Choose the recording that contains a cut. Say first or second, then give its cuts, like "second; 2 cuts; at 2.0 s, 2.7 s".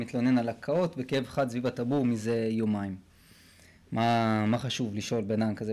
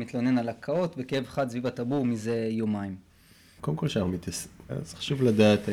second; 2 cuts; at 3.6 s, 4.7 s